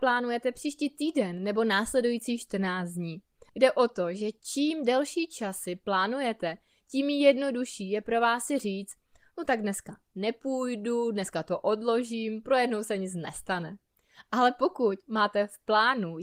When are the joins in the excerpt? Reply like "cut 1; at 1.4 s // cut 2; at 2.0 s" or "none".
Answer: cut 1; at 3.5 s